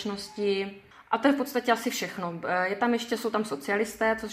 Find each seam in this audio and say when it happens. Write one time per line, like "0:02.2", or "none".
none